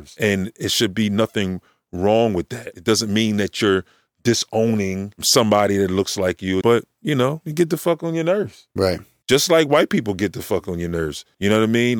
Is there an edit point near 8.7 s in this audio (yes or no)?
no